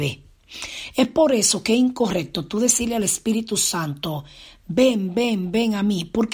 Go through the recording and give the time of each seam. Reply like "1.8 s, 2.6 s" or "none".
none